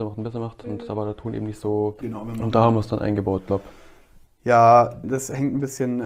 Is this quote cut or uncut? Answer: cut